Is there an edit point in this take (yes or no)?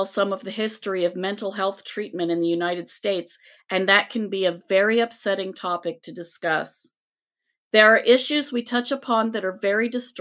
no